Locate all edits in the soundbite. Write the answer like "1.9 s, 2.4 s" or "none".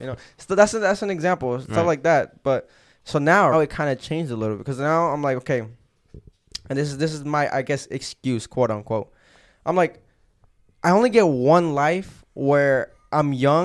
3.5 s